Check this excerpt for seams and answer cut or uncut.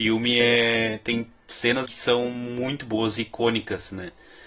cut